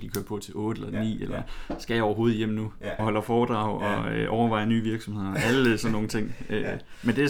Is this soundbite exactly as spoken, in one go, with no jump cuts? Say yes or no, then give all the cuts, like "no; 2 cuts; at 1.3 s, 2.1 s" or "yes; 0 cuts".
no; 1 cut; at 3.0 s